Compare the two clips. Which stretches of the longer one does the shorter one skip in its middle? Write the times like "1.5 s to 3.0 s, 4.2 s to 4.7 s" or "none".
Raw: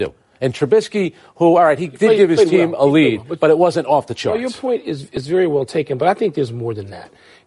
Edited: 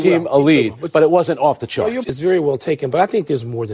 4.5 s to 5.1 s